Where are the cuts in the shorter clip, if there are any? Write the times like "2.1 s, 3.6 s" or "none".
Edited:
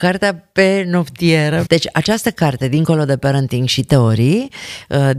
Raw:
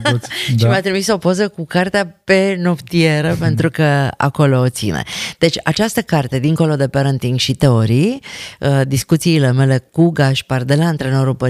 1.7 s